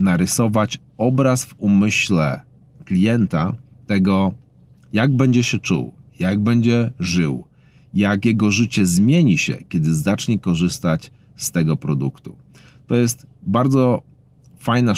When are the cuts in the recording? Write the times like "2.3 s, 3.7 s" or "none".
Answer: none